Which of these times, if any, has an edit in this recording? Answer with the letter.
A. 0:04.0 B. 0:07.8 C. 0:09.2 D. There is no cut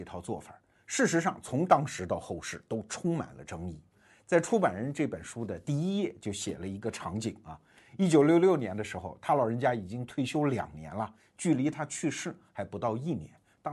D